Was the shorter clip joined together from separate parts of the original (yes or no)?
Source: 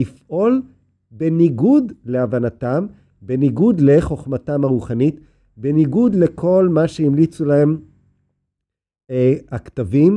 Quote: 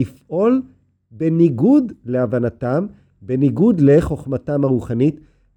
no